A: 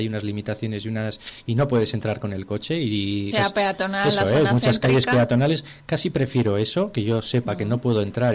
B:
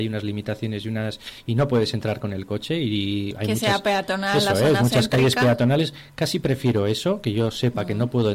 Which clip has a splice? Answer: A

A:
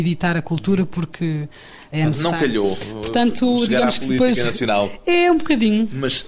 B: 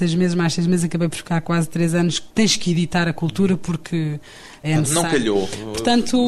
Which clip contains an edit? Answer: B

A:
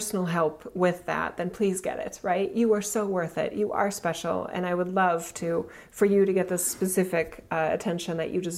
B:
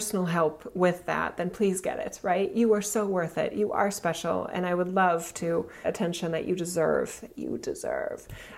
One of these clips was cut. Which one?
B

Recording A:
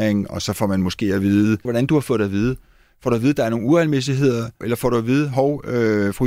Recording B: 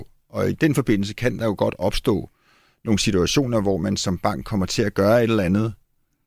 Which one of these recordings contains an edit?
A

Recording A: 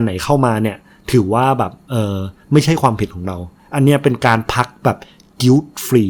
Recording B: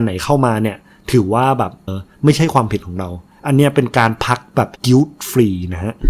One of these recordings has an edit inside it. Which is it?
B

